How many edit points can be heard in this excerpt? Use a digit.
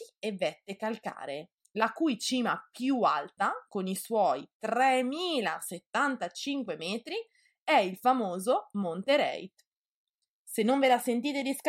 0